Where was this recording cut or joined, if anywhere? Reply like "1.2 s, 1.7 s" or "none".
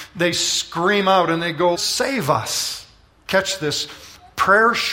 1.7 s, 3.3 s